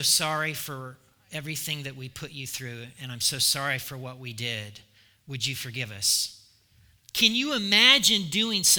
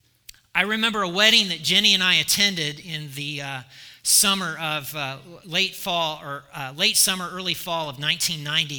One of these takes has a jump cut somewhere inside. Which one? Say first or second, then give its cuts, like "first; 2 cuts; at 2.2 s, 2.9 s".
first; 1 cut; at 7.0 s